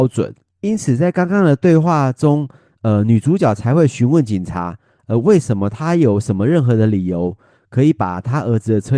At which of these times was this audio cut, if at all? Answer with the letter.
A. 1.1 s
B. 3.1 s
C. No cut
C